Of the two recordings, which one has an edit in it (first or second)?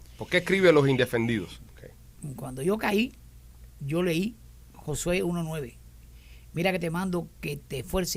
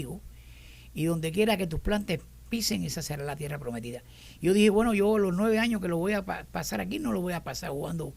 first